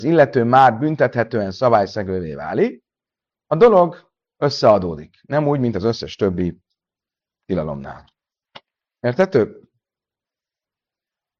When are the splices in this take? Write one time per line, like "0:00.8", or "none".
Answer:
none